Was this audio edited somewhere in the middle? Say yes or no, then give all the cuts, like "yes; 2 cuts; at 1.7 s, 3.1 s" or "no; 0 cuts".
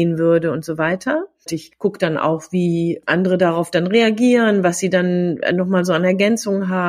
yes; 1 cut; at 1.5 s